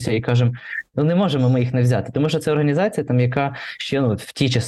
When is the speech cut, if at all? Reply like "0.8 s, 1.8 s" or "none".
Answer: 0.9 s